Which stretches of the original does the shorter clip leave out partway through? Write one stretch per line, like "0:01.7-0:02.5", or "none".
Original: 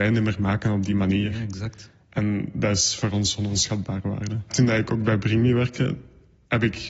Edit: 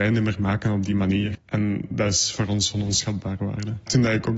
0:01.3-0:02.0